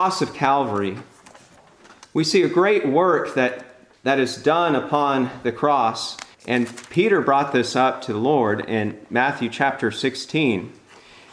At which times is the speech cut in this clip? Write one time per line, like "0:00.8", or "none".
0:06.3